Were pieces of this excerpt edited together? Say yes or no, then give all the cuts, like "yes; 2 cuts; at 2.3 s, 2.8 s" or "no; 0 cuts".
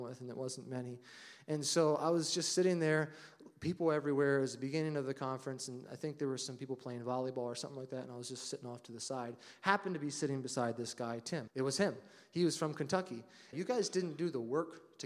yes; 2 cuts; at 11.5 s, 13.5 s